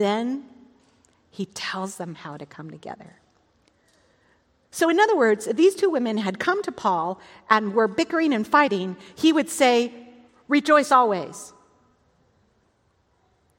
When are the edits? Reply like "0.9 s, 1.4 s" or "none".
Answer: none